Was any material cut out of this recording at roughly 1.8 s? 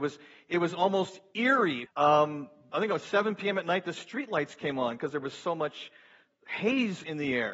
yes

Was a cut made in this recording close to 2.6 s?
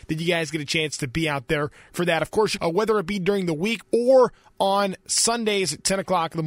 yes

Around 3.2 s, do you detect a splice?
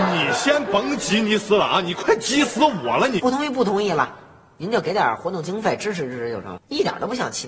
yes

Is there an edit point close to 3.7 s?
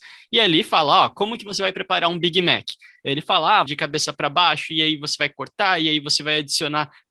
yes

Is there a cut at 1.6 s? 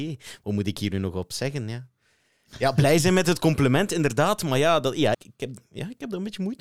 no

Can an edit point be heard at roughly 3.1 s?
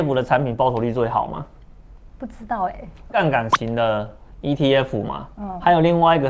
yes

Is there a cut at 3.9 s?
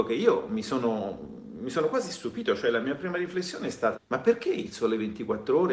yes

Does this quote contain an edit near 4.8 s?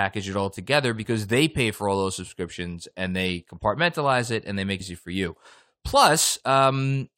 yes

